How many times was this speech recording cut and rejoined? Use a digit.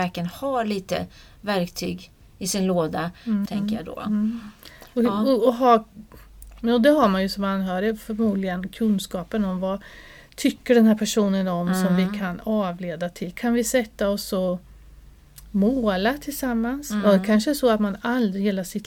1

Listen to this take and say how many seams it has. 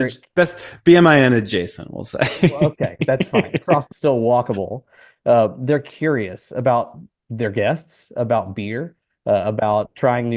1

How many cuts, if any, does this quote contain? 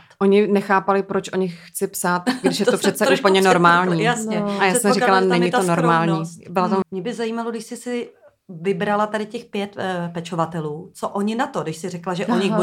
1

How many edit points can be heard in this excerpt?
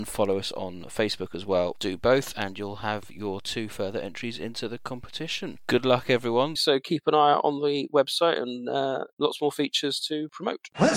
2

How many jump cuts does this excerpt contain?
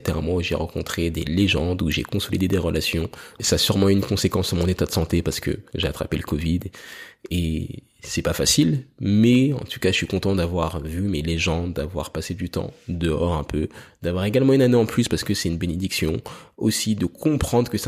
2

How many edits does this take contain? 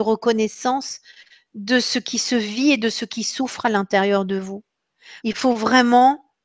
1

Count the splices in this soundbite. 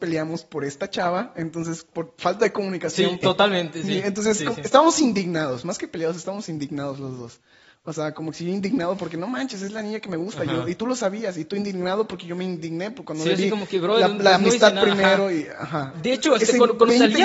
2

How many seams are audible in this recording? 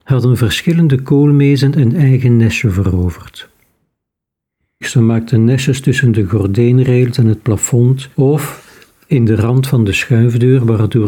2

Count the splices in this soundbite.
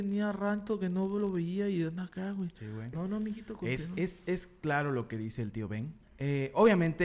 2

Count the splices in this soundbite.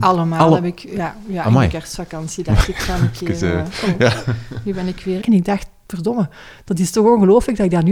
1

